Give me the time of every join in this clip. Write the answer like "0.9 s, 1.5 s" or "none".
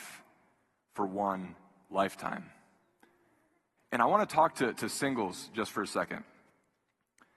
3.8 s